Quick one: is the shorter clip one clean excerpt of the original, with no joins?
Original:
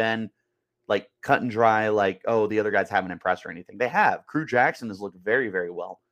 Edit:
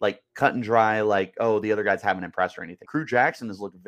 no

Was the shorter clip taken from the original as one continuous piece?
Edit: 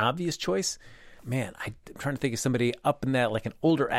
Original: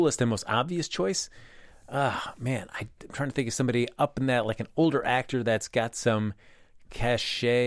no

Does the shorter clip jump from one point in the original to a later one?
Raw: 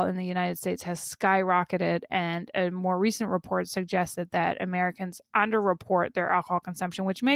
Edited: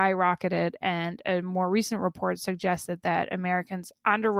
no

